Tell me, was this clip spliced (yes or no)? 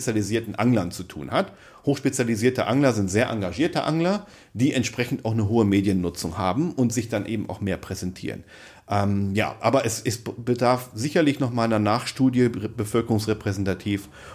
no